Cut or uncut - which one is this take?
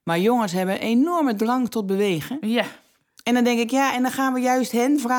uncut